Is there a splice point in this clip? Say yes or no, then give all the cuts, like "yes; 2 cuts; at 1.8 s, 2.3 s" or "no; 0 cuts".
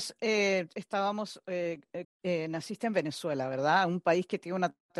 yes; 1 cut; at 2.0 s